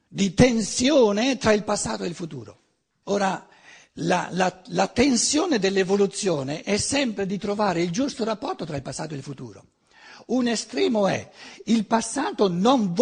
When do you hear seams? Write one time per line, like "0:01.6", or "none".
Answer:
0:03.0

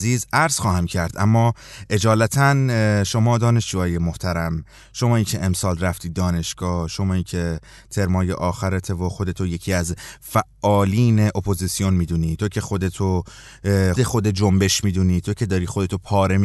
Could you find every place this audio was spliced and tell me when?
0:13.9

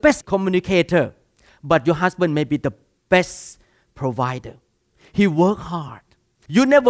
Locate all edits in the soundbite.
none

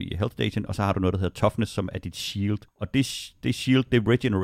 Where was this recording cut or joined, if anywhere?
0:02.7

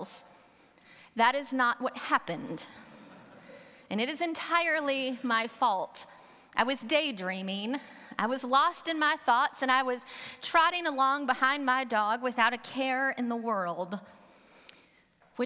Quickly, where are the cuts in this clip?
none

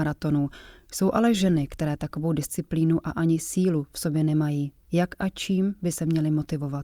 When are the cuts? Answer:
none

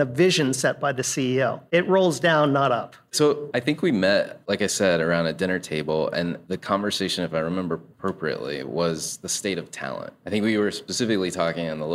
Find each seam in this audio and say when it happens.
0:03.1

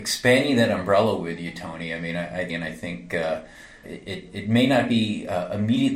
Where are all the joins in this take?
0:02.5
0:03.8

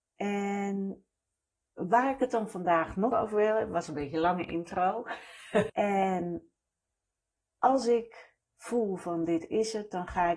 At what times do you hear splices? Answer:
0:03.1
0:05.7

